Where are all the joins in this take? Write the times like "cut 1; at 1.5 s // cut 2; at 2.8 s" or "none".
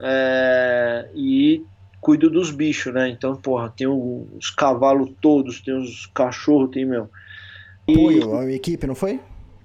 cut 1; at 7.9 s

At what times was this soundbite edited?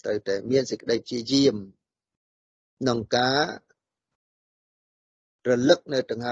none

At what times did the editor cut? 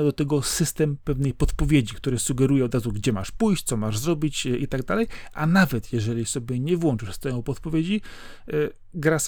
none

